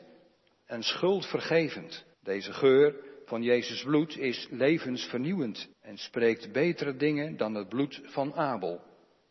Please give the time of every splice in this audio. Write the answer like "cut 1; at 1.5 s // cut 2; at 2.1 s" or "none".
cut 1; at 2.1 s // cut 2; at 5.7 s

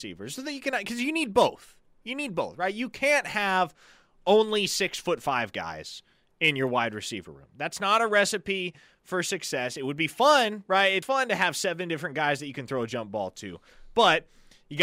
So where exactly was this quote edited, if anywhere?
cut 1; at 11.0 s

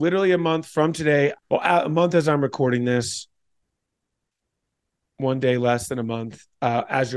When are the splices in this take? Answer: cut 1; at 1.3 s

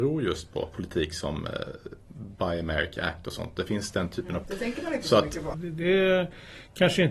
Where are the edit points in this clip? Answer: cut 1; at 4.4 s // cut 2; at 5.5 s

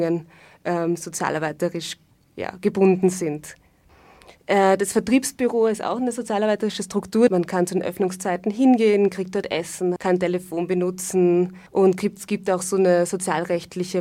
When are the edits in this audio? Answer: cut 1; at 7.3 s // cut 2; at 10.0 s // cut 3; at 11.7 s

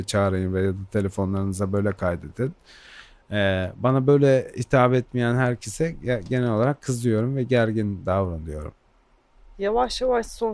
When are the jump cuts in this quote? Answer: none

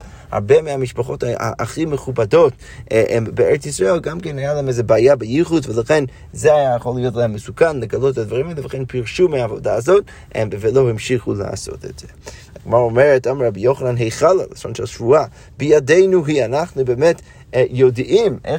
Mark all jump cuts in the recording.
none

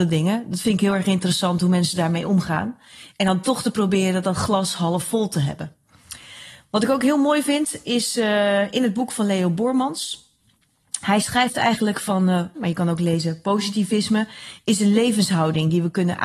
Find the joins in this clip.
cut 1; at 12.5 s

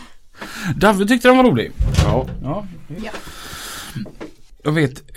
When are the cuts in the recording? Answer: cut 1; at 3.0 s

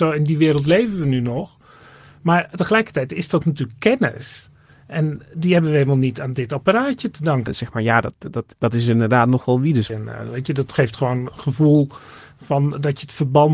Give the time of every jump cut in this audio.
cut 1; at 7.5 s // cut 2; at 9.9 s

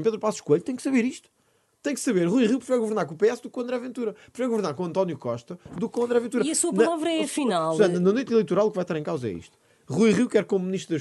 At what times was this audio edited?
none

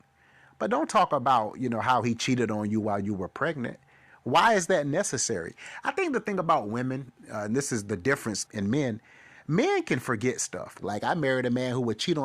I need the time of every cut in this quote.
cut 1; at 8.5 s // cut 2; at 10.8 s

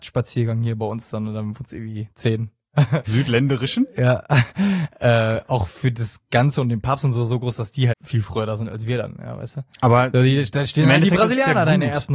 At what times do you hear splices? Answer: cut 1; at 3.0 s // cut 2; at 7.9 s

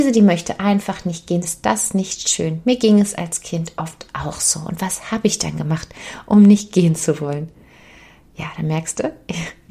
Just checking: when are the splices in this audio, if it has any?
cut 1; at 1.4 s

